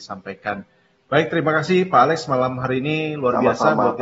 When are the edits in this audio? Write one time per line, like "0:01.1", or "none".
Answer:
none